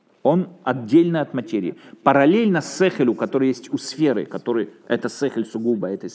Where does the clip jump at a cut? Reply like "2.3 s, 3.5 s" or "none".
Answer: none